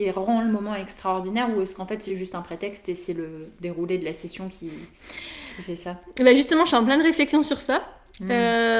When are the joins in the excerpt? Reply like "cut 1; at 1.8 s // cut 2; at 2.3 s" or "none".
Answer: none